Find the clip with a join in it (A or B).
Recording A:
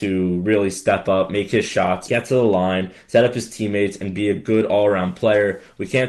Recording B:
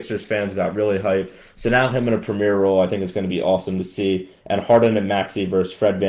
A